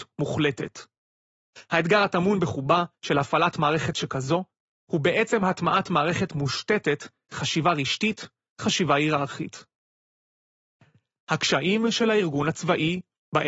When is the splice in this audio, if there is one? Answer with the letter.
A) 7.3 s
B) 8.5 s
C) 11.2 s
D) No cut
B